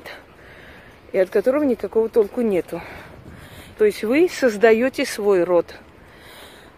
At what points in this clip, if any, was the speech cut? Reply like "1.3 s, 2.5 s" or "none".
3.7 s